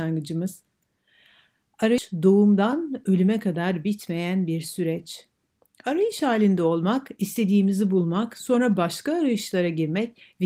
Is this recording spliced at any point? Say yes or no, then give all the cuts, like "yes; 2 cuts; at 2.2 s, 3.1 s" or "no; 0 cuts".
no; 0 cuts